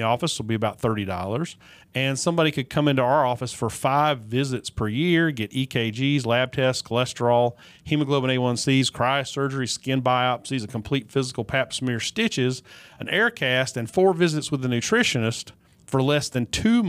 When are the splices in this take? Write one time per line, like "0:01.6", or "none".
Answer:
none